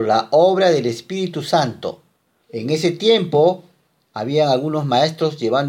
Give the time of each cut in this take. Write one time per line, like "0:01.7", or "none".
0:02.4